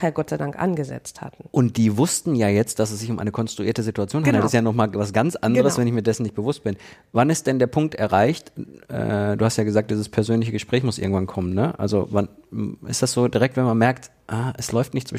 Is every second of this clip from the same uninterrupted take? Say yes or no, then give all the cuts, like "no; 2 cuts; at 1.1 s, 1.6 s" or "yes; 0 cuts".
yes; 0 cuts